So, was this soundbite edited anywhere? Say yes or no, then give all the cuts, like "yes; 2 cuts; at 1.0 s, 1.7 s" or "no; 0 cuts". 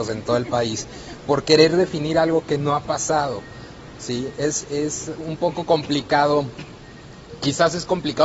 yes; 1 cut; at 4.6 s